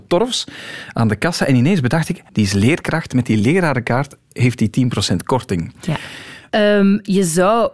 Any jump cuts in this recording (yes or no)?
yes